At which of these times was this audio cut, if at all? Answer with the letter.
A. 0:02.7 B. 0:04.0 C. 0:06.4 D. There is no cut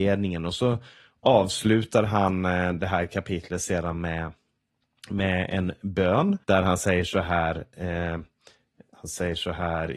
C